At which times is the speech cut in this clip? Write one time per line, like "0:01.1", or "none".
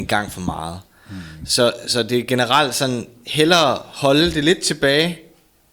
none

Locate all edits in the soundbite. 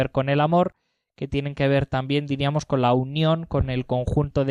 none

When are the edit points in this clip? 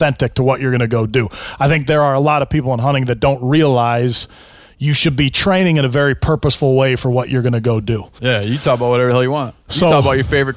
0:08.2

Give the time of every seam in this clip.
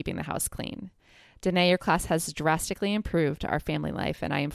none

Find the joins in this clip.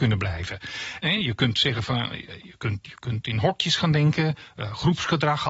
0:01.0

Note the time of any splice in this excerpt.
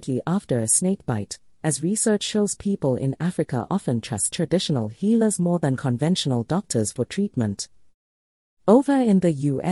none

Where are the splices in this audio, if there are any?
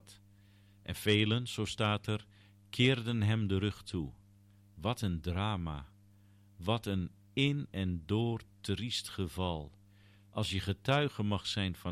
none

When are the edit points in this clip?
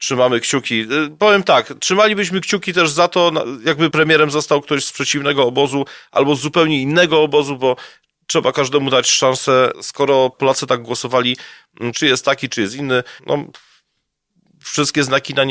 0:11.9
0:13.2

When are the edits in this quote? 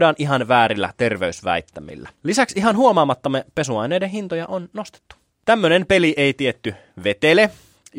none

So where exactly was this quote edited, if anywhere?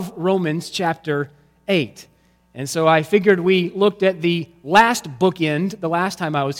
none

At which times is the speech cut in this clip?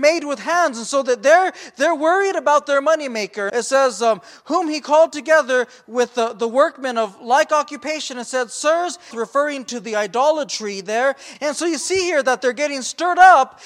0:03.5
0:09.1
0:11.3

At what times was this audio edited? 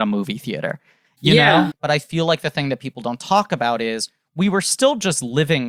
0:01.7

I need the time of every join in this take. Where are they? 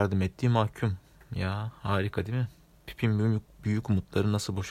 none

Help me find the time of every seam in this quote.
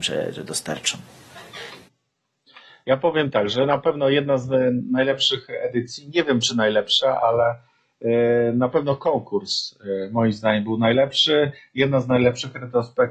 none

